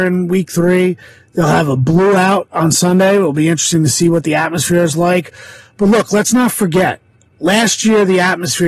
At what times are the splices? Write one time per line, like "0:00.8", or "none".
none